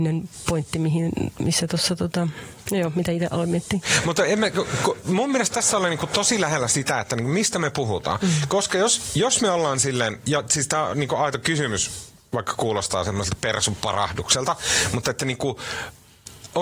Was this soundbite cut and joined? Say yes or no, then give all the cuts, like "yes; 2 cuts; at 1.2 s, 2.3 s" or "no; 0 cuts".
no; 0 cuts